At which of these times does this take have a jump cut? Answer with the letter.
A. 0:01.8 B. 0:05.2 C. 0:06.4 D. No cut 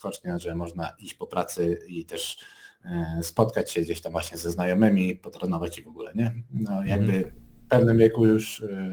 D